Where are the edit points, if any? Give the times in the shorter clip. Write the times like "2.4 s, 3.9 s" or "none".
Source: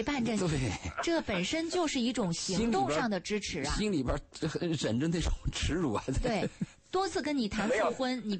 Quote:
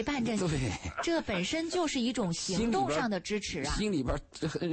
none